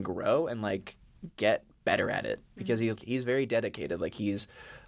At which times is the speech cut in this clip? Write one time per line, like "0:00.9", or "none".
0:03.0